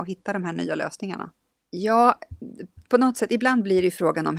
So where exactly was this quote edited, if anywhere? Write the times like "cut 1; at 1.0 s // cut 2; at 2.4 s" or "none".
cut 1; at 1.5 s

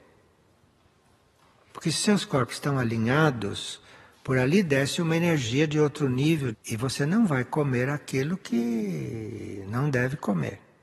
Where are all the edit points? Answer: cut 1; at 1.7 s // cut 2; at 6.5 s

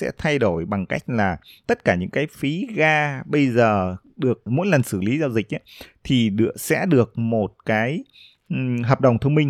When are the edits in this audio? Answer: cut 1; at 4.5 s

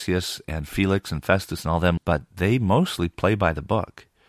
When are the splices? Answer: cut 1; at 2.0 s

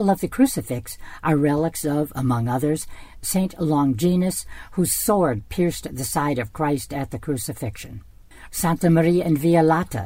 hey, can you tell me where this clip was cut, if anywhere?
cut 1; at 8.5 s

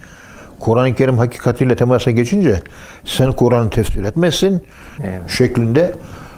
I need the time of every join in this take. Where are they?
cut 1; at 5.0 s

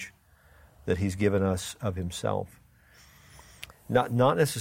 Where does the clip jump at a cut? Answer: cut 1; at 3.7 s

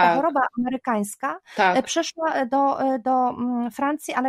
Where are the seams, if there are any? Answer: none

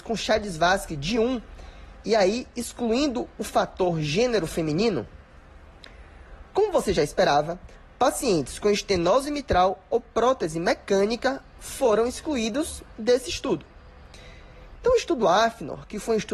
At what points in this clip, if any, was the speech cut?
cut 1; at 14.8 s

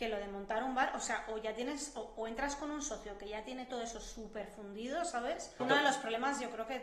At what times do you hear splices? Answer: cut 1; at 5.6 s

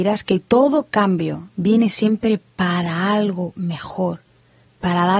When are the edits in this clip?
none

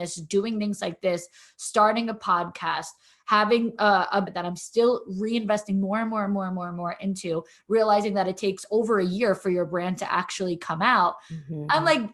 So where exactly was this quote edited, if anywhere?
cut 1; at 4.2 s

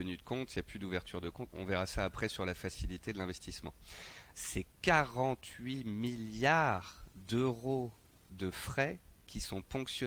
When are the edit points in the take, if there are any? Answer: cut 1; at 1.5 s // cut 2; at 4.3 s

